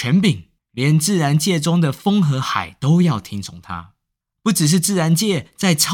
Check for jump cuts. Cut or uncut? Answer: uncut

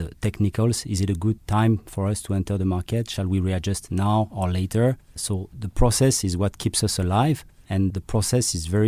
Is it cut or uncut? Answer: uncut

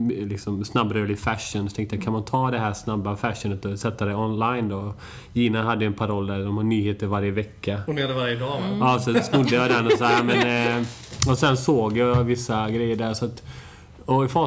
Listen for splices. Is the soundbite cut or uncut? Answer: uncut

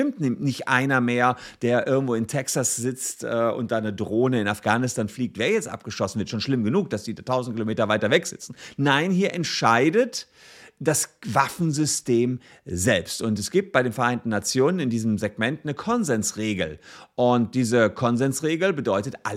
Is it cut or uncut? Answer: uncut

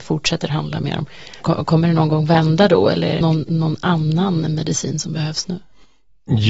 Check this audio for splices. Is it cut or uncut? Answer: cut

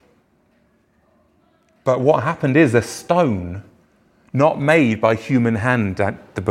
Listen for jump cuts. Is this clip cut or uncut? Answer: uncut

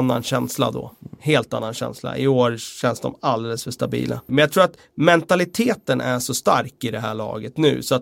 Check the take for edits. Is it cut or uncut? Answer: cut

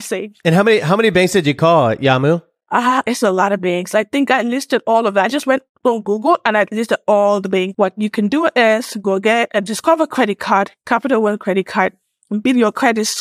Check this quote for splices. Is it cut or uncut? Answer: cut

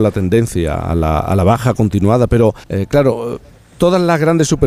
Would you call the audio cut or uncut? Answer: cut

